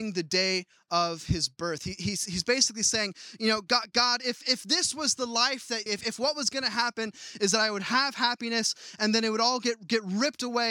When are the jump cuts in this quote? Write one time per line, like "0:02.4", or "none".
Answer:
0:05.9